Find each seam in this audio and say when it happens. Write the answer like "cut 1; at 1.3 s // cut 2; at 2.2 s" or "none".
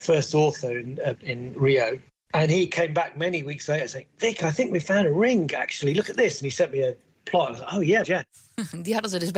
cut 1; at 1.2 s // cut 2; at 8.0 s